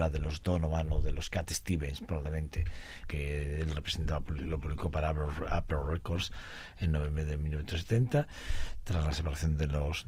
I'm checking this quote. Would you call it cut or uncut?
cut